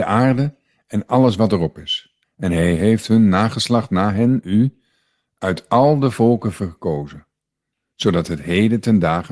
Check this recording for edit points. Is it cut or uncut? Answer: cut